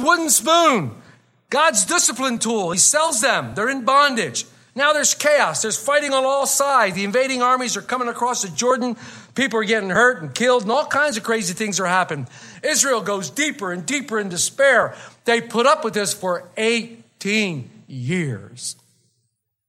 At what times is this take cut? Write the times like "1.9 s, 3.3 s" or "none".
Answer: none

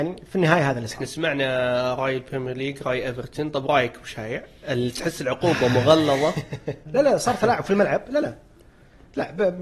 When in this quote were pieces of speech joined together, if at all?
6.9 s

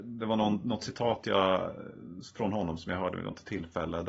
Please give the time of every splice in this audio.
none

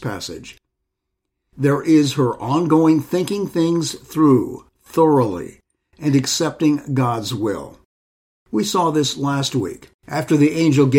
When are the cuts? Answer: 10.0 s

